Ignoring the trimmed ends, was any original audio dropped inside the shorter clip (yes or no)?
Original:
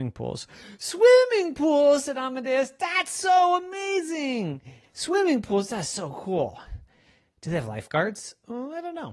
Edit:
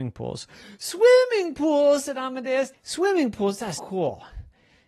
yes